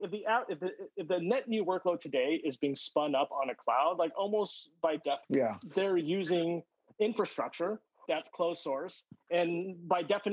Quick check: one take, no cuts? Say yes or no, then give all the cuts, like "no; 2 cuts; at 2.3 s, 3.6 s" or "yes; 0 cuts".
no; 2 cuts; at 5.2 s, 8.1 s